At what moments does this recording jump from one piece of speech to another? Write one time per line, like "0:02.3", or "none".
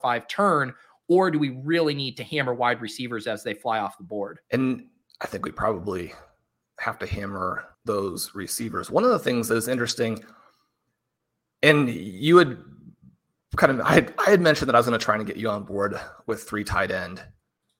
0:04.4
0:07.7